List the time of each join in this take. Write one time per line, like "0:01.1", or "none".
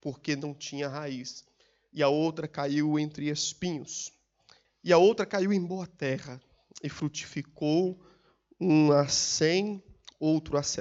0:04.6